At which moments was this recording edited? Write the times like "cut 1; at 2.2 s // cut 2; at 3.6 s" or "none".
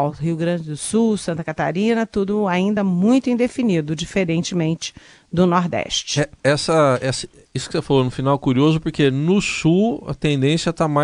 none